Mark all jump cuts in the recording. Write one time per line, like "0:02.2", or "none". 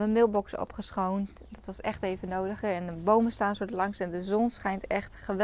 0:02.6